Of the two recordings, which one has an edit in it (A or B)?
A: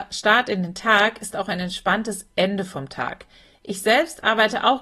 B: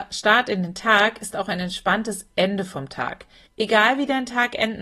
B